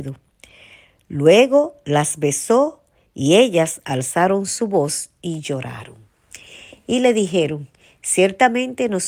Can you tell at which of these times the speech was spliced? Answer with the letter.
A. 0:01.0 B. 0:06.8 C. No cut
C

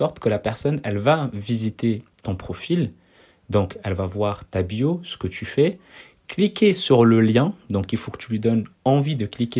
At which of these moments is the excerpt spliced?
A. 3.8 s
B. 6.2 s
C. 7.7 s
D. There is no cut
D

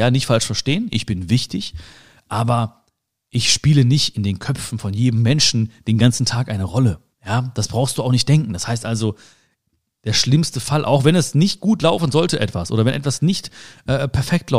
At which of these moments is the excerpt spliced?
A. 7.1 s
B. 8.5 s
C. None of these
A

